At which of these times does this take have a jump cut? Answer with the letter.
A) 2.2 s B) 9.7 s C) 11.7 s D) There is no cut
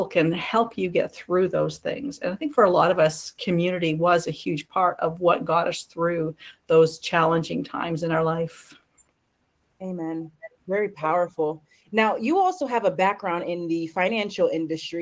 D